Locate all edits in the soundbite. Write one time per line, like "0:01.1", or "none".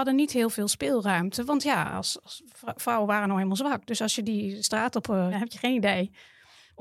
0:05.3